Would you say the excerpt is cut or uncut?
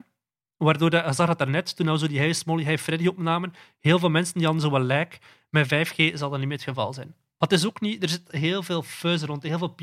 uncut